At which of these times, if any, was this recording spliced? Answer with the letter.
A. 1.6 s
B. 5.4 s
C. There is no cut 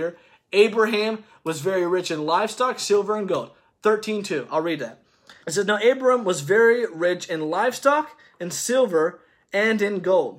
B